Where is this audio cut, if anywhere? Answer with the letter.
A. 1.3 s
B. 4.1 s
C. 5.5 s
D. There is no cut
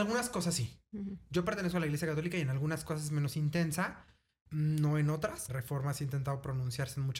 C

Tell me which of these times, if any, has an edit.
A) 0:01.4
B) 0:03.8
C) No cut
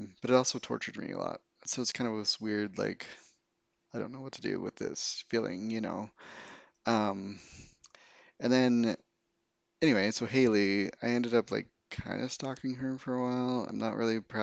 C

